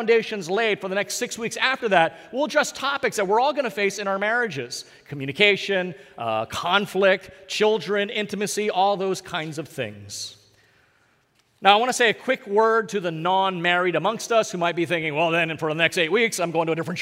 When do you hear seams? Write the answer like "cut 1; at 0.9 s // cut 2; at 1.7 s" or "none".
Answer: none